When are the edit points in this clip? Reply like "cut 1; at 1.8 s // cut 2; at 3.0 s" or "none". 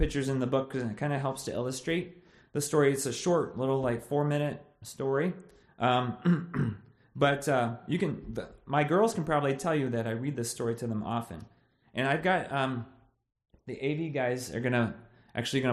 cut 1; at 11.8 s